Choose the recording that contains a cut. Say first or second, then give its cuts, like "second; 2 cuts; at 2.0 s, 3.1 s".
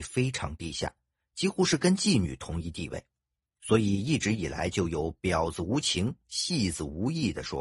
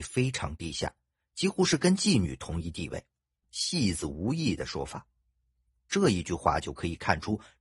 second; 1 cut; at 3.4 s